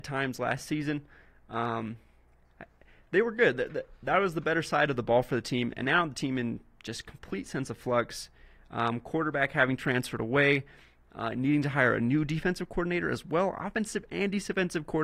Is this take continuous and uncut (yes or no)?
yes